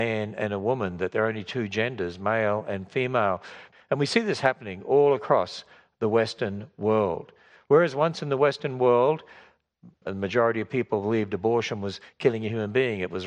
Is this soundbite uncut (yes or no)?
no